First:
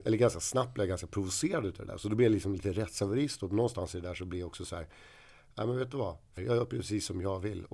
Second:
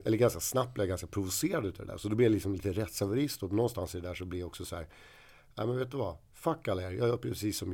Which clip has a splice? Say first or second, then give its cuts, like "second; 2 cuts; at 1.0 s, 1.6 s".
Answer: first; 1 cut; at 6.4 s